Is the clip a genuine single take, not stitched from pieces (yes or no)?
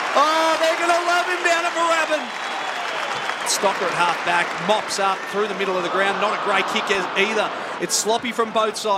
no